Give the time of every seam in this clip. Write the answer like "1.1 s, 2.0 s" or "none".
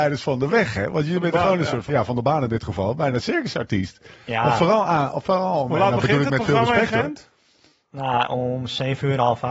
1.9 s